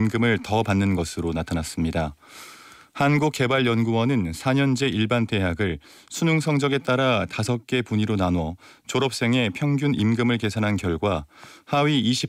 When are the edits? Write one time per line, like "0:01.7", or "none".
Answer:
none